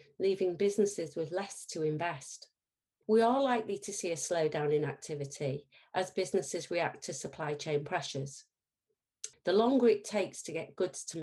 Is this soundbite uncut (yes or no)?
no